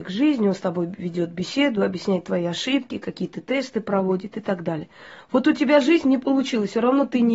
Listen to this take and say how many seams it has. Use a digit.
0